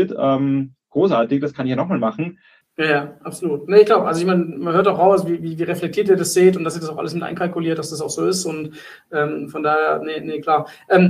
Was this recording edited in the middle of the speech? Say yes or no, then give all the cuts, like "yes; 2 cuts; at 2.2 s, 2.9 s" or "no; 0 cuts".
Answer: yes; 1 cut; at 2.6 s